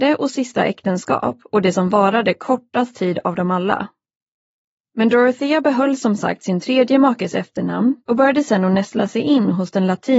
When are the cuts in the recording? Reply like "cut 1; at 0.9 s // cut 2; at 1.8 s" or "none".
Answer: cut 1; at 4.9 s // cut 2; at 8.0 s